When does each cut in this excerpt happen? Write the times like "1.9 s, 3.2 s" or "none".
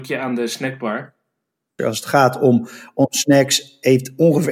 1.8 s